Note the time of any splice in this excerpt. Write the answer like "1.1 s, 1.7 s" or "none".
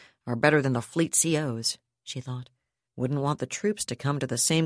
2.9 s